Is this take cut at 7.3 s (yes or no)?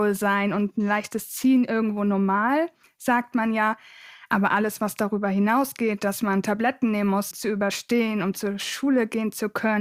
yes